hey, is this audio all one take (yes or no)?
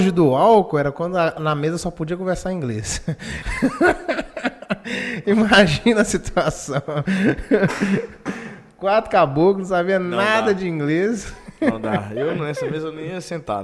yes